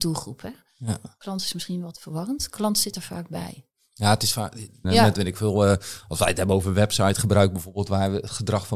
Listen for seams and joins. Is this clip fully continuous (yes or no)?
no